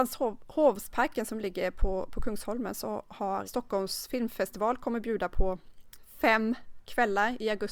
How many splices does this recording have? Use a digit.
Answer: 1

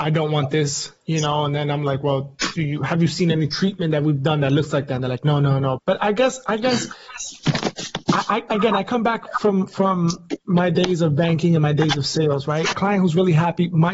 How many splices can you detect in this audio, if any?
2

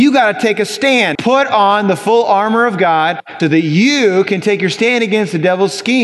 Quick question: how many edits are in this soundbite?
2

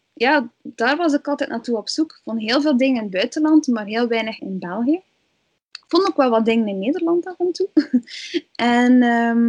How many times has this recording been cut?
2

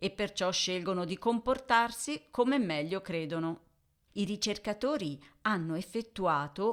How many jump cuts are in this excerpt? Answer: 1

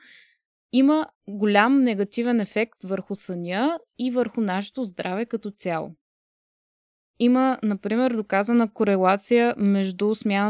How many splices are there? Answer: 0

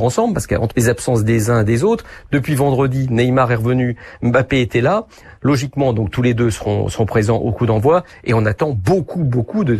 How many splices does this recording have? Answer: 0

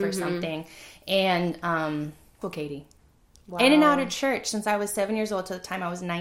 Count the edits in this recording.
1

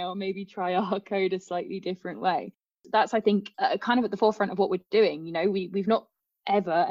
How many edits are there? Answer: 0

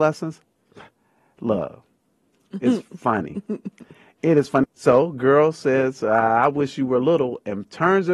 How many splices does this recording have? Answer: 1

